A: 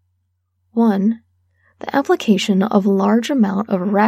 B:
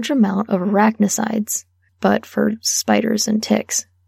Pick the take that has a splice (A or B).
B